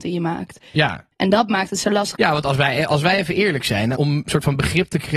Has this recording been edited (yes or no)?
yes